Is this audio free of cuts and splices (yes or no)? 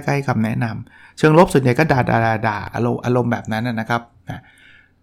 yes